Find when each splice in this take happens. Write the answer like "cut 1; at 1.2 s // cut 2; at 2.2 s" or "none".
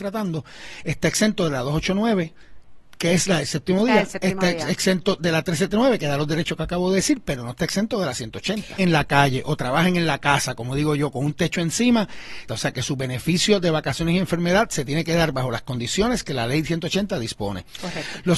cut 1; at 8.8 s // cut 2; at 12.5 s